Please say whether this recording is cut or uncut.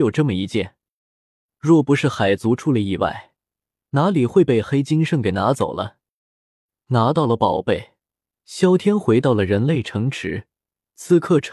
uncut